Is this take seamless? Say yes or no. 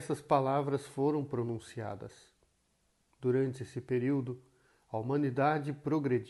yes